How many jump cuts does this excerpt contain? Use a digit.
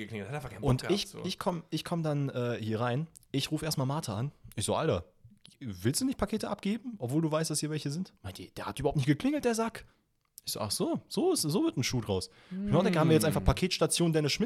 0